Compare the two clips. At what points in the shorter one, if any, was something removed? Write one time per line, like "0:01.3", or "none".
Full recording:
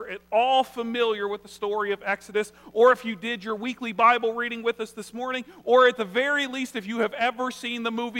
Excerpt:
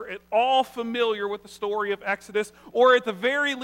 0:02.7